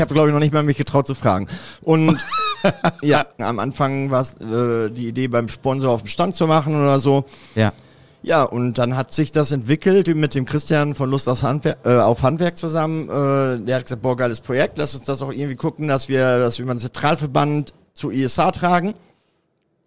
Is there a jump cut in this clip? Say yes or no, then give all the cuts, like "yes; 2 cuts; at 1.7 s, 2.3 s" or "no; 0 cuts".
yes; 1 cut; at 3.4 s